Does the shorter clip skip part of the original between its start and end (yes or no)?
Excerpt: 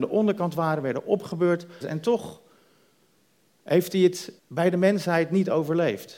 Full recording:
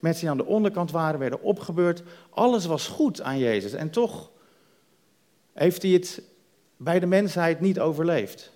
yes